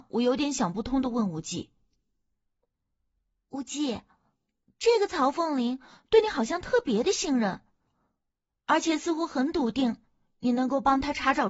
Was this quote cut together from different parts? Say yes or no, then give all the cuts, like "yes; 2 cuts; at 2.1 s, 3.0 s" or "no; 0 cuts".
no; 0 cuts